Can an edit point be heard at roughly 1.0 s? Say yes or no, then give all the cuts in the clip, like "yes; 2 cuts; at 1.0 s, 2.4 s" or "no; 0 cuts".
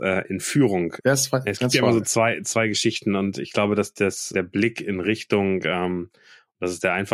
yes; 2 cuts; at 1.0 s, 4.3 s